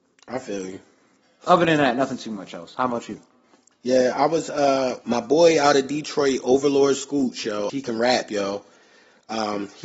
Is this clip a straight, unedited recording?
no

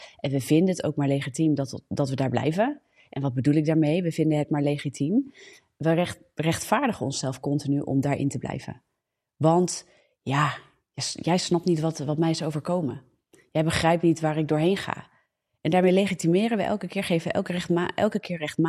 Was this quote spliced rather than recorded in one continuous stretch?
no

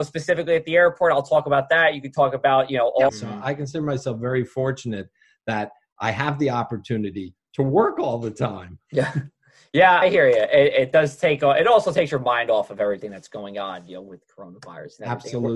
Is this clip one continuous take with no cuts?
no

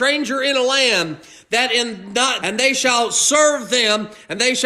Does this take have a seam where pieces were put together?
yes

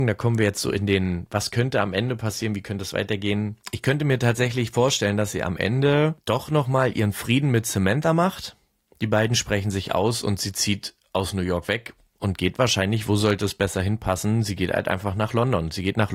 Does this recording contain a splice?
no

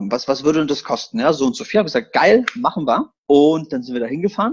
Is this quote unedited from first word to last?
no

